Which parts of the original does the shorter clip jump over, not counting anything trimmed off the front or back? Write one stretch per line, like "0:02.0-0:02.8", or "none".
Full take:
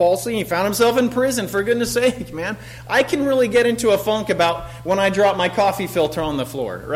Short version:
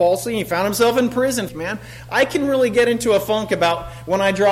0:01.5-0:02.3